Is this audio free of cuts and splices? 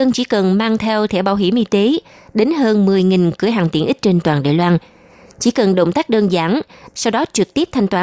no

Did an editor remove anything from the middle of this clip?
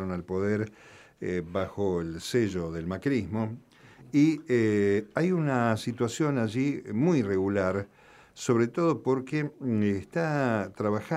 no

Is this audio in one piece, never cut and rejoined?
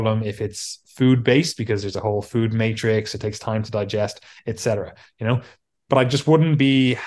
yes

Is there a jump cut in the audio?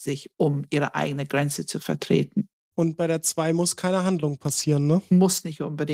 yes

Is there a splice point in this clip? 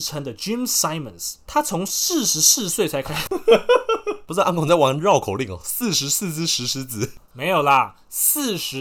no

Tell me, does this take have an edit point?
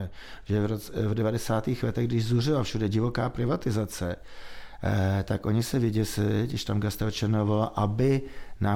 no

